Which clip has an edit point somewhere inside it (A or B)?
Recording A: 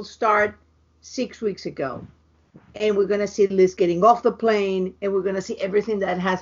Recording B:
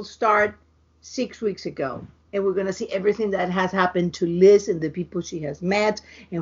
B